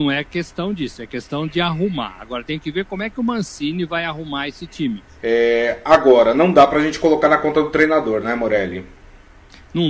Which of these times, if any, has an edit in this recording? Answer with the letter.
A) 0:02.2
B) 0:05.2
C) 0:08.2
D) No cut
B